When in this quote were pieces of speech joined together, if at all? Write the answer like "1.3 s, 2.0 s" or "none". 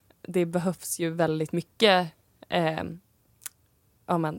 none